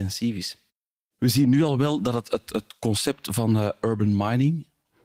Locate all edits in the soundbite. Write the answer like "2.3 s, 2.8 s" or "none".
1.0 s